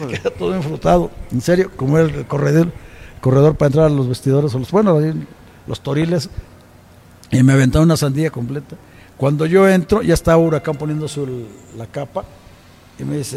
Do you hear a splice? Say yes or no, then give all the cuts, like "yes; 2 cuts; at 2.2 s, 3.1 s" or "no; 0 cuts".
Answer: no; 0 cuts